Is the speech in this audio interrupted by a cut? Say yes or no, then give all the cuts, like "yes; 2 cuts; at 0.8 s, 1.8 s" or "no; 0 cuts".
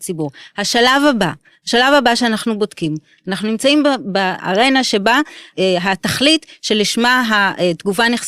no; 0 cuts